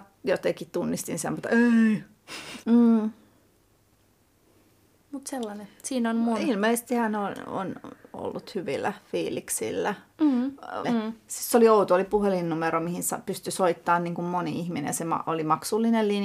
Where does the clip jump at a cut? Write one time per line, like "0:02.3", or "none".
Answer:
0:02.6
0:10.8